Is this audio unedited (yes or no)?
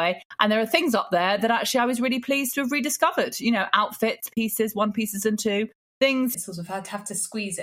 no